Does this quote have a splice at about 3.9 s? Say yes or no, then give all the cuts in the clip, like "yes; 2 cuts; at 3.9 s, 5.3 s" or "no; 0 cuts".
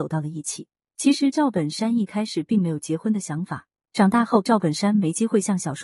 yes; 1 cut; at 3.9 s